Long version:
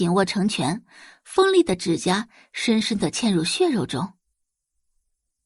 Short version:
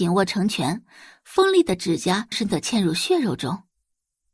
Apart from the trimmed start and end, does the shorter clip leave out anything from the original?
yes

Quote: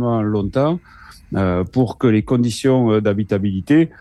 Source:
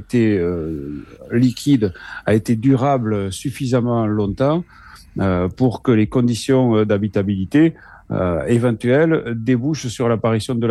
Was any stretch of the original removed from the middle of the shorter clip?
no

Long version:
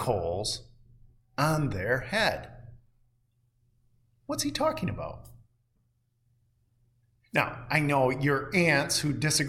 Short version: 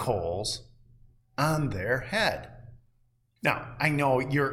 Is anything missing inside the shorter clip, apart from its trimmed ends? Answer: yes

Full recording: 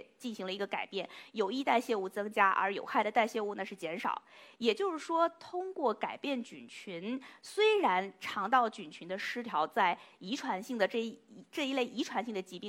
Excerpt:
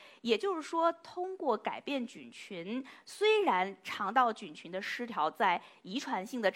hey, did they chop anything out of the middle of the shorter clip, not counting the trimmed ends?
no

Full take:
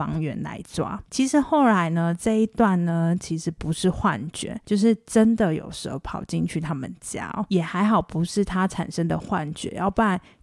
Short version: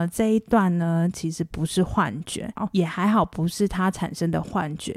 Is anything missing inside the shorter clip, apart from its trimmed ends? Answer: yes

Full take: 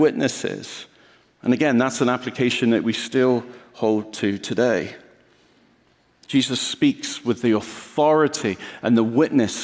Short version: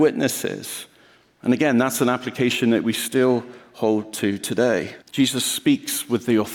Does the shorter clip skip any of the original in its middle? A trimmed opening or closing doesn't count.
yes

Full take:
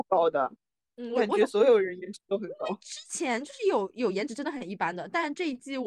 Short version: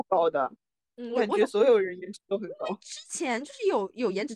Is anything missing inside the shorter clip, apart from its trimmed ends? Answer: no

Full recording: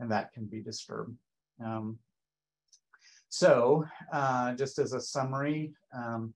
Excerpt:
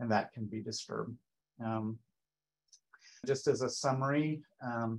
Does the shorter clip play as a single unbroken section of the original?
no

